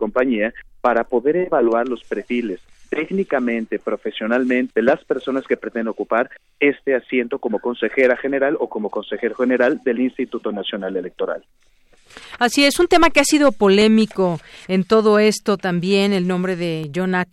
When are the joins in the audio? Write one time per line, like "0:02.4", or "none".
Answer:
0:04.7